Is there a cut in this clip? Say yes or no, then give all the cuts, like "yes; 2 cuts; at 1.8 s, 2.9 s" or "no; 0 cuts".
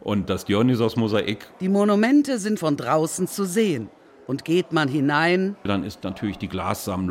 yes; 1 cut; at 2.6 s